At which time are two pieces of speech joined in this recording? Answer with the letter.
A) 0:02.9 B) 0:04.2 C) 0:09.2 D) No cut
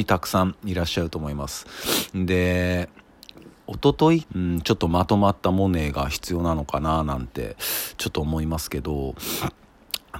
B